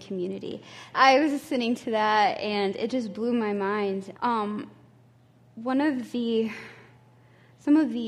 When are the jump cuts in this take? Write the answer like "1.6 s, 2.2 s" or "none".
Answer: 0.9 s, 4.1 s

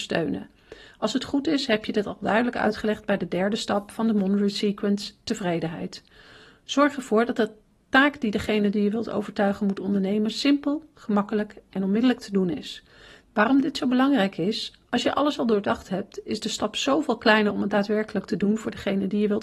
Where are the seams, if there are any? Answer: none

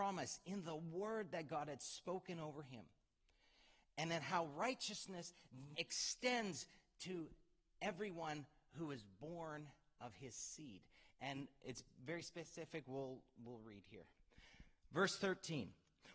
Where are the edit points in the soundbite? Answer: 5.7 s

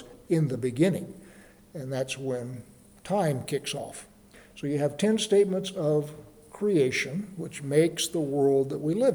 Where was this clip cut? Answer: none

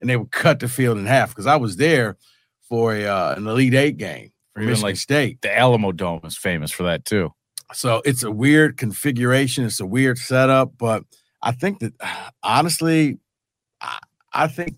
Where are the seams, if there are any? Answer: none

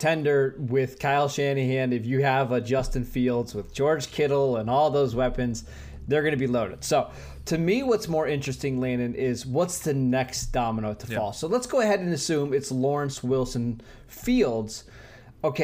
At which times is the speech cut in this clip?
none

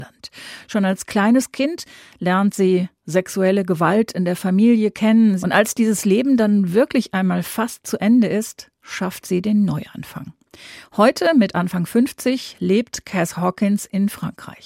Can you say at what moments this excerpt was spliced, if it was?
5.4 s

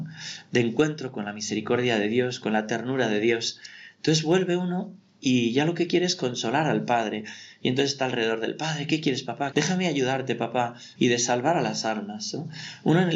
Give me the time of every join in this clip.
9.5 s, 11.0 s

